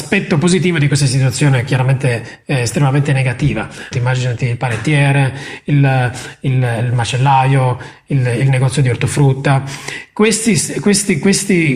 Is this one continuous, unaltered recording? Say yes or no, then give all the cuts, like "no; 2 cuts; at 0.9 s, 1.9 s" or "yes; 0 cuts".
no; 1 cut; at 3.9 s